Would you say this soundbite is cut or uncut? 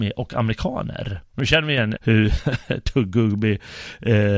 cut